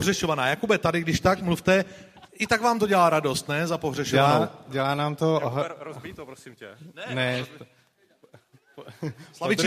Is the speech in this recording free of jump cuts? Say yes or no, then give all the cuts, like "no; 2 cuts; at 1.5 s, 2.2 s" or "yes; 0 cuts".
yes; 0 cuts